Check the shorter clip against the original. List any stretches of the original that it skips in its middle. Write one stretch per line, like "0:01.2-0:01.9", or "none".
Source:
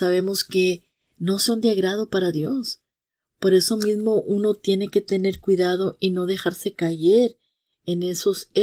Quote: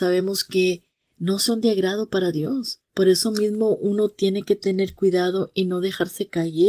0:02.9-0:03.3